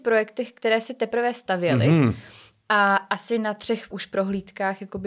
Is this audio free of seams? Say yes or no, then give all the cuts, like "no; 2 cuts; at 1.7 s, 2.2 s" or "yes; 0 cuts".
no; 1 cut; at 3.9 s